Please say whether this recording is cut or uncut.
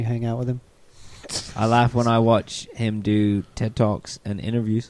uncut